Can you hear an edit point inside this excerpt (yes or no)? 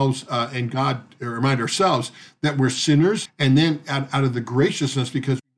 yes